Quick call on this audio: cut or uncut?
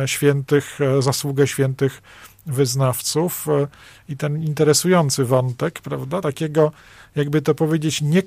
uncut